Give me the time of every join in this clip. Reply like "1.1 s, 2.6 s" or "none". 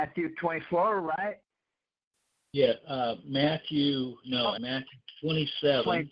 4.6 s